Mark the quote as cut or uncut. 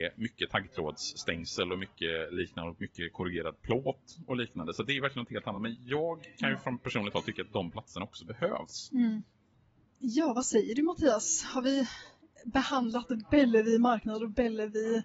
uncut